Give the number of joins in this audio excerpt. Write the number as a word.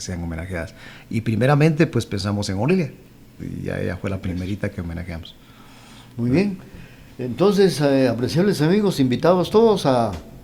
zero